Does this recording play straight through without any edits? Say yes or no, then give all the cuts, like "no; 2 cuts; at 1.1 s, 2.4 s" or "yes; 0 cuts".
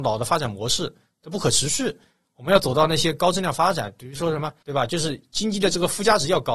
no; 1 cut; at 4.6 s